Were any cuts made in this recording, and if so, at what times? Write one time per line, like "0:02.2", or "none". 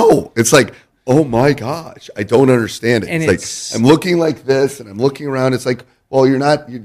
none